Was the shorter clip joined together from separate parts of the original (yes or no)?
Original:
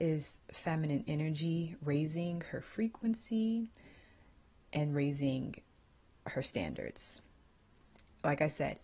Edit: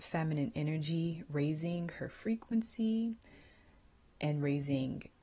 no